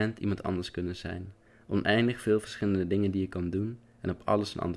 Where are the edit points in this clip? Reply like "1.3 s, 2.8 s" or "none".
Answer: none